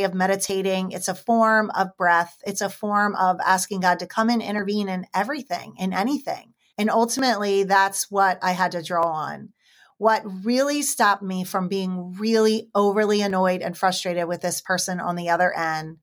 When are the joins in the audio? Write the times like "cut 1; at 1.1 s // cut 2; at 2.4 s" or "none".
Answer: cut 1; at 6.7 s

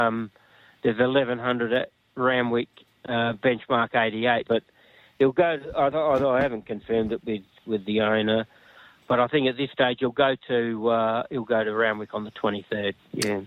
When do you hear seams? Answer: cut 1; at 4.5 s // cut 2; at 7.6 s

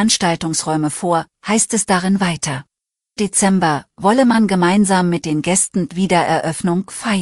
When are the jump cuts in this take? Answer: cut 1; at 3.2 s

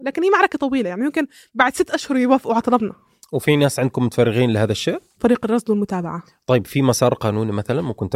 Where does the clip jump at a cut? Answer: cut 1; at 5.2 s

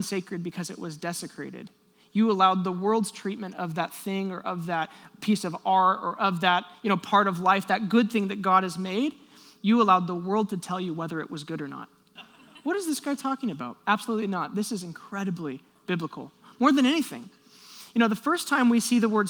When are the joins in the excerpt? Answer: cut 1; at 12.2 s

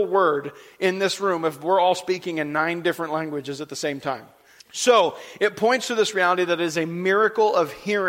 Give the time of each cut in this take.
cut 1; at 4.6 s

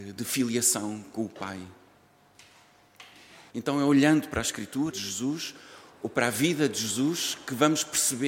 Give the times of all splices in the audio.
cut 1; at 3.5 s // cut 2; at 4.9 s

